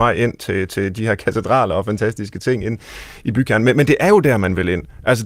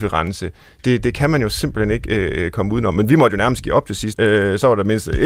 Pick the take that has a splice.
second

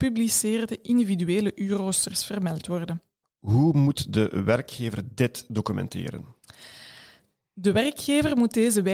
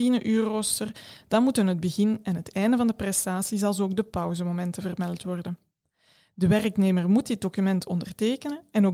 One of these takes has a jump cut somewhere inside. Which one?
first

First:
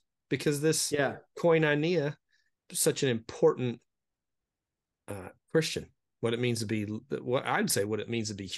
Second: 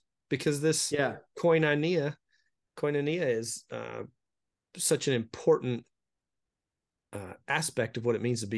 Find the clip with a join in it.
first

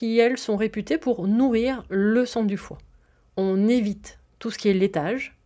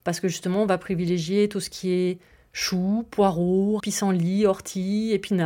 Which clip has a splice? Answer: second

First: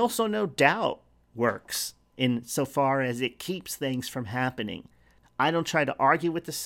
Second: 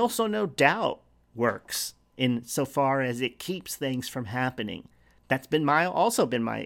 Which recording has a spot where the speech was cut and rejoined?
first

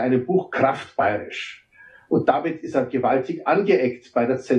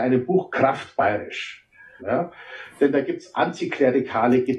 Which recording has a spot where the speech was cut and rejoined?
second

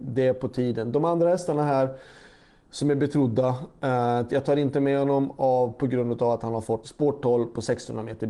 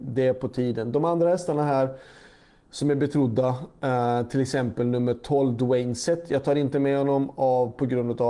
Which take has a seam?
first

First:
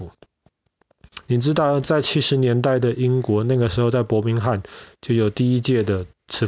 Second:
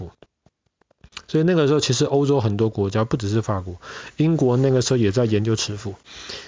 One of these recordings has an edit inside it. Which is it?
first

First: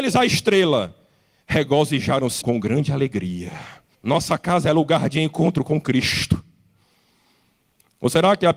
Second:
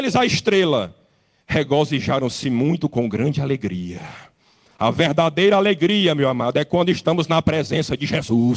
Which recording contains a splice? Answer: first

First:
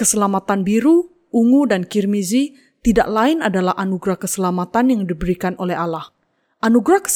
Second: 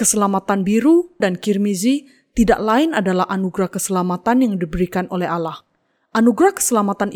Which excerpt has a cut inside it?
second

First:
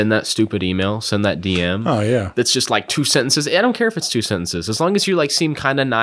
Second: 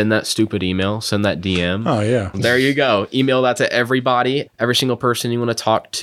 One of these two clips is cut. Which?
second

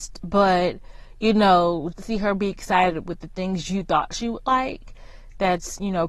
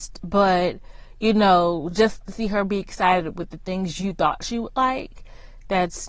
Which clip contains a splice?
first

